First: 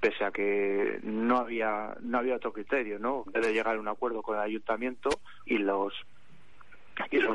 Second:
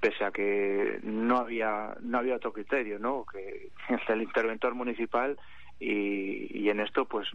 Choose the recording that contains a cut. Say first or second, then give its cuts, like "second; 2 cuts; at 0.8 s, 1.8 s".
first; 2 cuts; at 3.3 s, 5.5 s